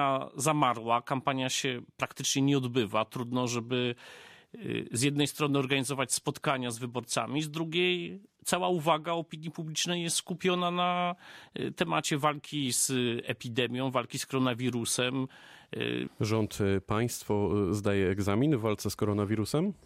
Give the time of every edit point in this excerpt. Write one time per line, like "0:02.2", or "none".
0:16.1